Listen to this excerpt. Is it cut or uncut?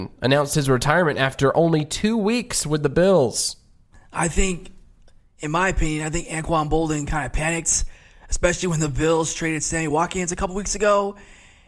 cut